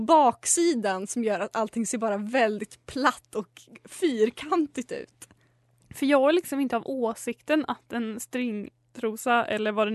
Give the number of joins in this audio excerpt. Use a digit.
0